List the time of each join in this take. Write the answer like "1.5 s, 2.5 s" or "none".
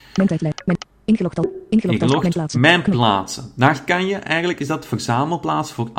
none